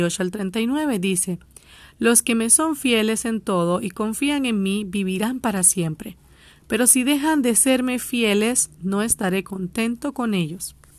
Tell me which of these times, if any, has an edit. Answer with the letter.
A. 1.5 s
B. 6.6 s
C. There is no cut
C